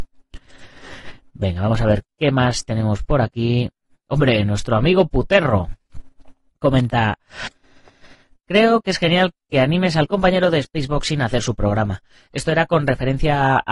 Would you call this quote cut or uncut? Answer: uncut